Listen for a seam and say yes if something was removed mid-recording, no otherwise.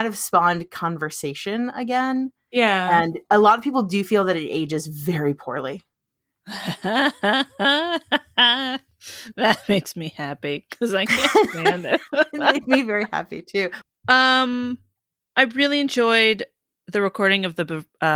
yes